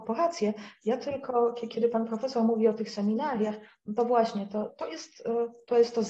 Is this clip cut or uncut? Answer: cut